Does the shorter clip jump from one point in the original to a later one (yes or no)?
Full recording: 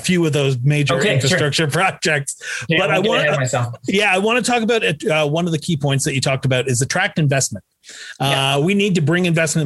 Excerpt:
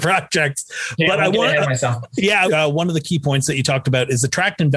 yes